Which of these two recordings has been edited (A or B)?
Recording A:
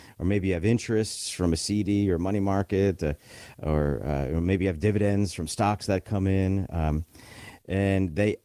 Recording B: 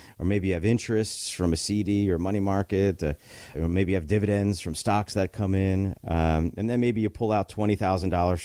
B